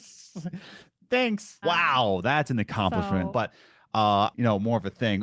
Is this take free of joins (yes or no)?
no